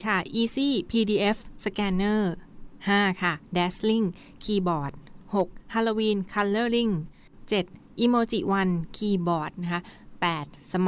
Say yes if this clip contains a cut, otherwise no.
no